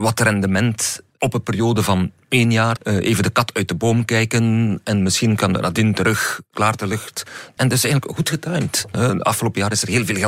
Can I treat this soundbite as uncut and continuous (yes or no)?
no